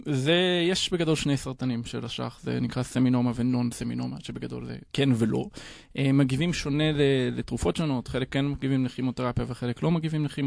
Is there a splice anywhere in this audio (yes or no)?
no